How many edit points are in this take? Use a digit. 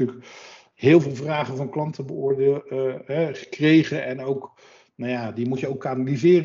0